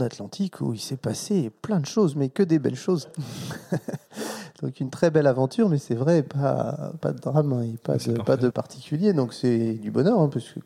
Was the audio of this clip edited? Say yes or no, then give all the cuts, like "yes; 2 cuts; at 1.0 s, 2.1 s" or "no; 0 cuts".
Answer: yes; 2 cuts; at 7.0 s, 8.5 s